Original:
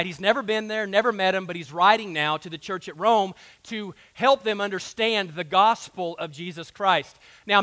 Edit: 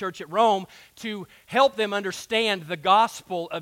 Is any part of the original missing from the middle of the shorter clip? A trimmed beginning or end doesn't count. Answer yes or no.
no